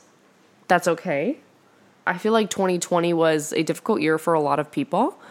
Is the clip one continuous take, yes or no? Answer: yes